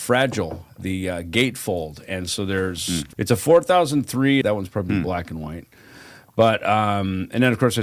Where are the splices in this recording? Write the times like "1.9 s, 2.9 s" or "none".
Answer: 3.1 s, 4.4 s